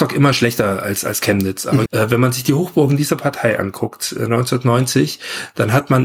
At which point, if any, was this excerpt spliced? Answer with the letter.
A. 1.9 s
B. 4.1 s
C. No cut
A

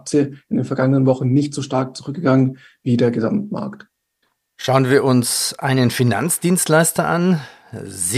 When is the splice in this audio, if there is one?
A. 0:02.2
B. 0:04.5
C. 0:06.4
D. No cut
D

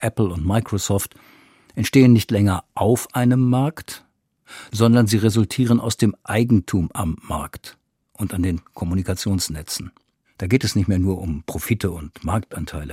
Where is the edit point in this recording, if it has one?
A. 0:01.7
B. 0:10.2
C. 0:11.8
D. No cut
B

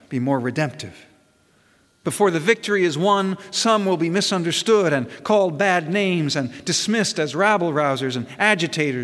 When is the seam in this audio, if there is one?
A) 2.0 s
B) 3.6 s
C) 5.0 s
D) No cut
A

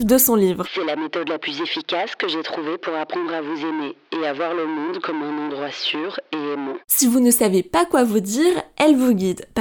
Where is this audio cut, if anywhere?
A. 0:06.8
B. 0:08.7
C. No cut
C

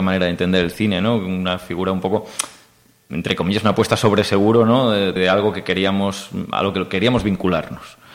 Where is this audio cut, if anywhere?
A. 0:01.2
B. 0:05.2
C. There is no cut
B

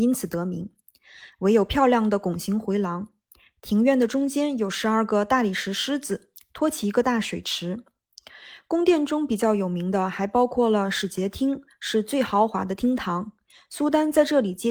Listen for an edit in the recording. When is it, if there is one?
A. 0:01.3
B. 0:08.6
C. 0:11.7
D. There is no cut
A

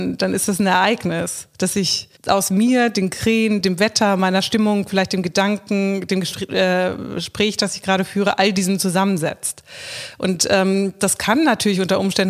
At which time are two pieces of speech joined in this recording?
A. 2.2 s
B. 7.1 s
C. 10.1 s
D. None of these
A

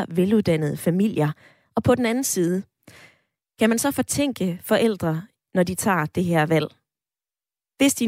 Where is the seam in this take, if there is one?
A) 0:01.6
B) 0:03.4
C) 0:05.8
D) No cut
A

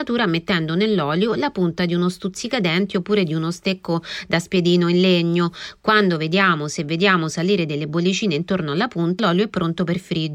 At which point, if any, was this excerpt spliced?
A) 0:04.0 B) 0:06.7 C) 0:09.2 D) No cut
C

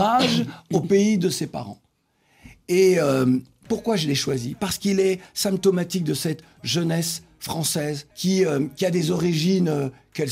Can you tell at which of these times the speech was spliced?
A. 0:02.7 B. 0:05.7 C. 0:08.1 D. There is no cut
C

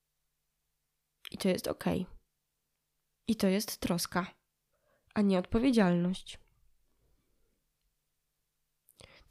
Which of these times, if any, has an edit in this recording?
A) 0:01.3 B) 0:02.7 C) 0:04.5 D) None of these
D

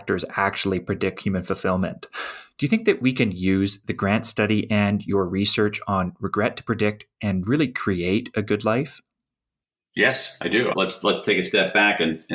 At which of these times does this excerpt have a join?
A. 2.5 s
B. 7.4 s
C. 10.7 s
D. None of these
C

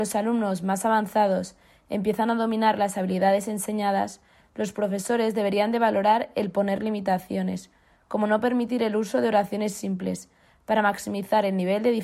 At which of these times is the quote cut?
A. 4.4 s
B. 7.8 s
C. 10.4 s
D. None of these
D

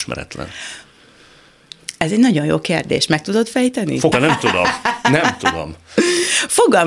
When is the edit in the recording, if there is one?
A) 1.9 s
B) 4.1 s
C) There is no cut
B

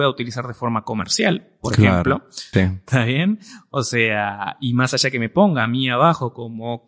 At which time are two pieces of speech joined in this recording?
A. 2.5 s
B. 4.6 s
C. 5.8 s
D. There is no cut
A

